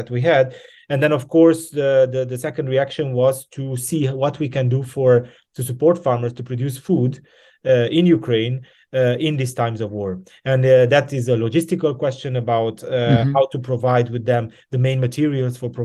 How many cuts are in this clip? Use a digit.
0